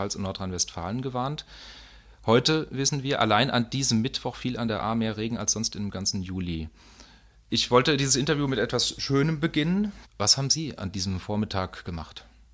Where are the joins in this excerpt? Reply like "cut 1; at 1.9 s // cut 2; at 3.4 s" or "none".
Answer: cut 1; at 7.5 s // cut 2; at 10.0 s

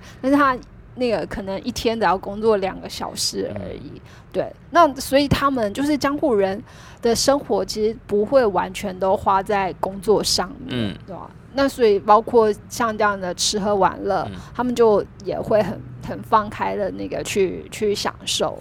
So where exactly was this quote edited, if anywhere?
none

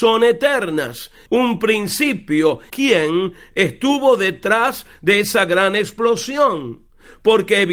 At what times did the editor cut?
cut 1; at 1.3 s // cut 2; at 2.7 s

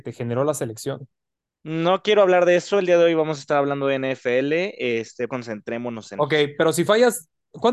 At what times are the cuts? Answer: cut 1; at 5.3 s

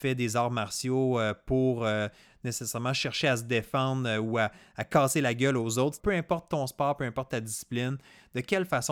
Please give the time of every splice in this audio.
cut 1; at 6.0 s

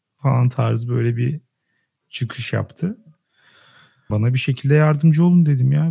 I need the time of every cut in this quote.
cut 1; at 4.1 s

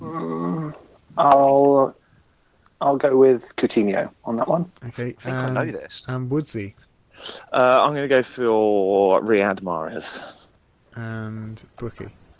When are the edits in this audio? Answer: cut 1; at 4.8 s

